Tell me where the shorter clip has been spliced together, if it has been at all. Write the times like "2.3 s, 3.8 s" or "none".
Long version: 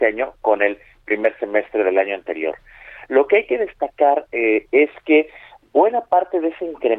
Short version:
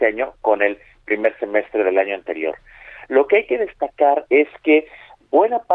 4.3 s